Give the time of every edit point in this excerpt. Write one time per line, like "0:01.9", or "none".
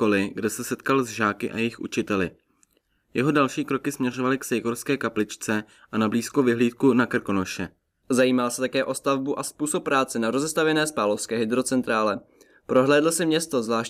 0:08.0